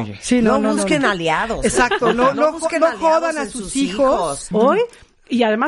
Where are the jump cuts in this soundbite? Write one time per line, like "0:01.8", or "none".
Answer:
0:04.5